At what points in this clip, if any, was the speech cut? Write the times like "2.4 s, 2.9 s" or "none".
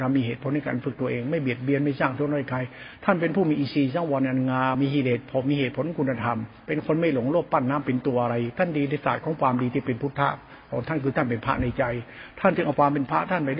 4.7 s